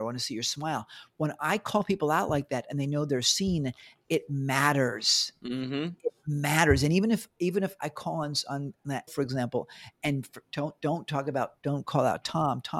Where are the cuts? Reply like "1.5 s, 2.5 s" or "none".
9.1 s, 11.6 s